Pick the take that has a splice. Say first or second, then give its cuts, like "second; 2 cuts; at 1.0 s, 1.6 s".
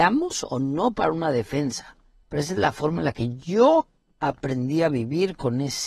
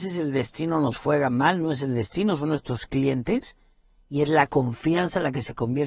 first; 1 cut; at 2.2 s